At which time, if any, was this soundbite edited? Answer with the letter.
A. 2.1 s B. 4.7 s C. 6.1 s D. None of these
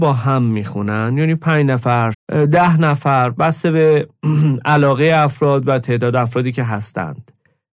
A